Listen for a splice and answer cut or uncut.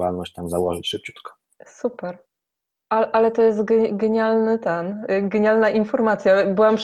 uncut